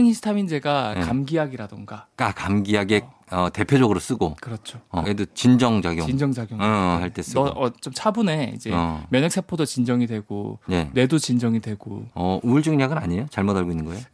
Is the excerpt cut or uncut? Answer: cut